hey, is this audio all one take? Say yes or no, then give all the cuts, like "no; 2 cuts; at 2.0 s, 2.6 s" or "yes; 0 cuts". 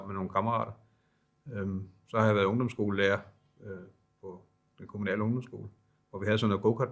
yes; 0 cuts